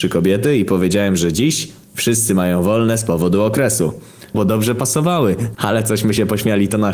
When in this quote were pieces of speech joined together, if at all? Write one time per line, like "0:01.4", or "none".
0:04.3
0:05.5